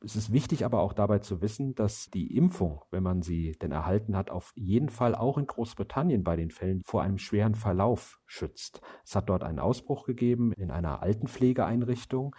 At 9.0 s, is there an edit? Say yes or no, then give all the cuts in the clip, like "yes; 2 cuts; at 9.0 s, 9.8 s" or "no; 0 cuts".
no; 1 cut; at 6.8 s